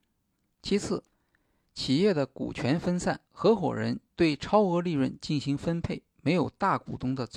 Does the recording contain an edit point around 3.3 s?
yes; 1 cut; at 3.3 s

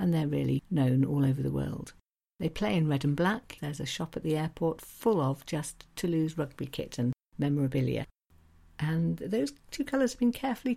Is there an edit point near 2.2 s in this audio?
no; 1 cut; at 3.6 s

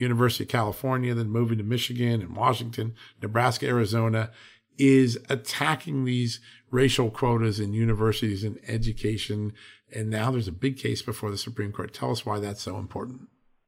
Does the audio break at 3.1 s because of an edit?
no; 0 cuts

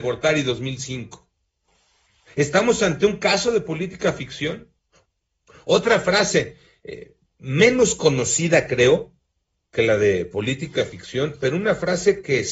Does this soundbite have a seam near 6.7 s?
no; 0 cuts

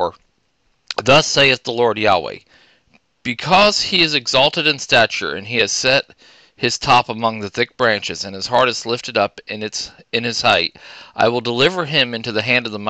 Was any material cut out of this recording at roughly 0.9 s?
no; 0 cuts

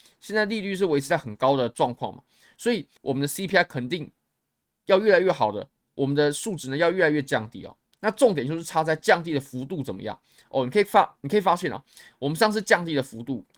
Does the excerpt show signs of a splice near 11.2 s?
no; 1 cut; at 3.0 s

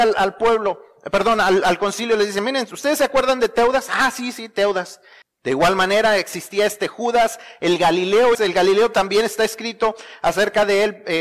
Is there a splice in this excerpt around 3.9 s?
no; 2 cuts; at 5.2 s, 8.3 s

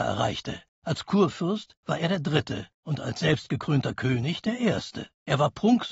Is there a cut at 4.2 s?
no; 0 cuts

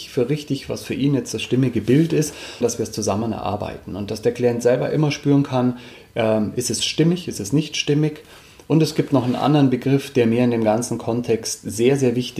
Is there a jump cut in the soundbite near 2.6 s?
yes; 1 cut; at 2.6 s

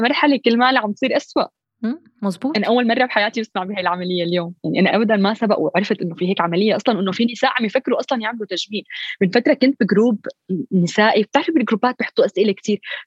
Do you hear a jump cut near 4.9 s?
yes; 1 cut; at 4.9 s

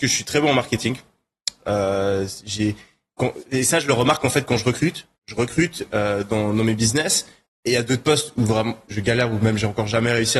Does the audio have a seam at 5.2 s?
yes; 3 cuts; at 5.2 s, 7.5 s, 8.9 s

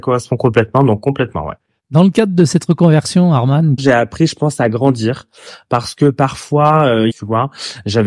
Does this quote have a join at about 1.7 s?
no; 2 cuts; at 3.8 s, 7.1 s

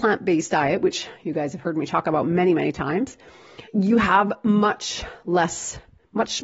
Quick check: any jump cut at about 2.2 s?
no; 1 cut; at 3.7 s

